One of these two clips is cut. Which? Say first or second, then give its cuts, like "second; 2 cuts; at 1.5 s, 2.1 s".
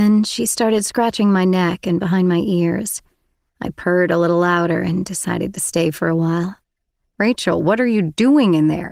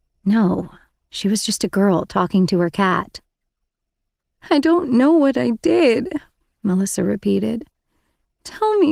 first; 1 cut; at 7.1 s